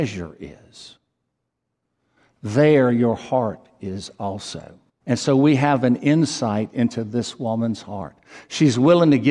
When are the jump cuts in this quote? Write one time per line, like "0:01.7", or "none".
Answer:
0:05.0